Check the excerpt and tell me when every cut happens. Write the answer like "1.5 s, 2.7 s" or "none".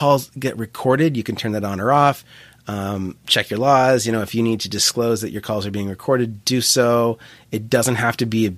3.2 s